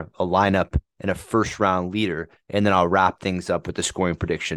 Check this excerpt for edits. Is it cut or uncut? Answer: uncut